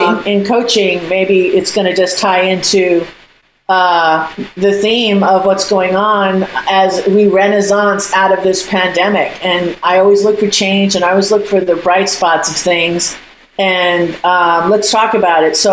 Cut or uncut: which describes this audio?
uncut